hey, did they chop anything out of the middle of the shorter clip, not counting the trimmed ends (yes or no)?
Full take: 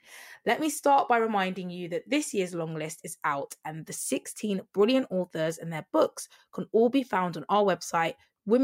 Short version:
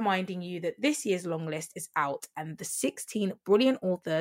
no